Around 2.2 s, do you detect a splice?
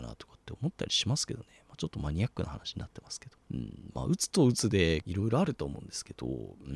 no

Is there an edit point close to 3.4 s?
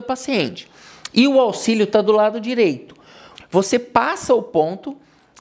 yes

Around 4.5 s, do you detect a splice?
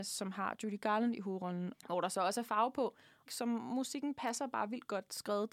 no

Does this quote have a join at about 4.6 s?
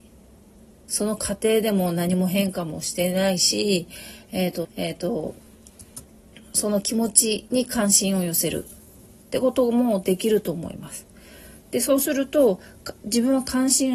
yes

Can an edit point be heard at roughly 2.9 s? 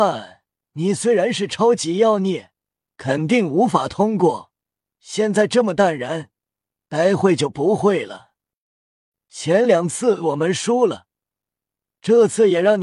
yes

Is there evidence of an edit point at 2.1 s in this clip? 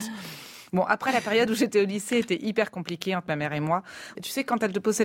no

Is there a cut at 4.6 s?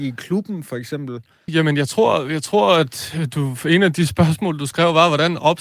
no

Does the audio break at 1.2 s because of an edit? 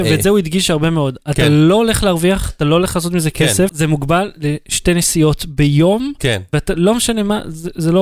no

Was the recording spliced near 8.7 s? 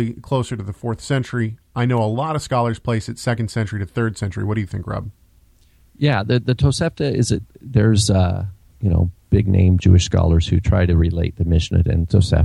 yes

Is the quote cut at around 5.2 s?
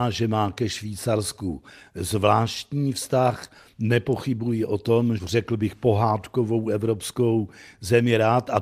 yes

